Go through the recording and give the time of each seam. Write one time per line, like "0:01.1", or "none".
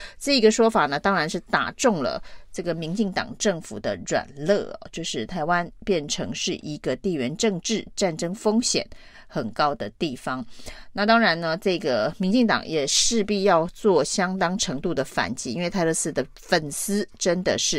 none